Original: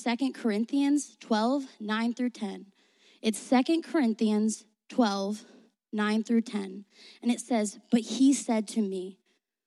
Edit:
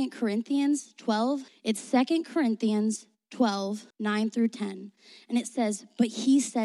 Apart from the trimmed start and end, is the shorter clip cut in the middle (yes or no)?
yes